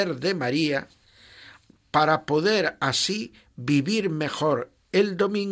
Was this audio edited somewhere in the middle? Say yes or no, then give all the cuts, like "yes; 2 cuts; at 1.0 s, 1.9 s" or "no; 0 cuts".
no; 0 cuts